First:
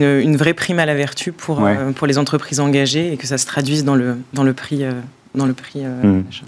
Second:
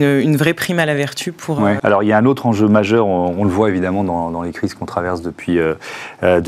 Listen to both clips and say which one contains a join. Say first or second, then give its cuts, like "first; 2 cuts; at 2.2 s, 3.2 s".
second; 1 cut; at 1.8 s